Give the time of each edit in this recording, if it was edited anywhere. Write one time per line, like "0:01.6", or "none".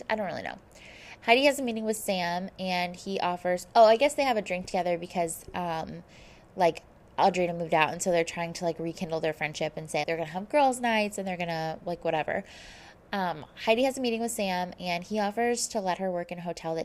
0:01.2
0:10.0